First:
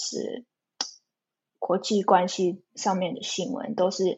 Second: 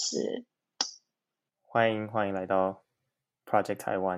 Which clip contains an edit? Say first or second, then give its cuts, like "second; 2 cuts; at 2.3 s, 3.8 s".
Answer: second; 1 cut; at 1.5 s